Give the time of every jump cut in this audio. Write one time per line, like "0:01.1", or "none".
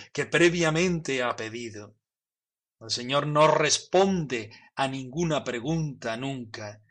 none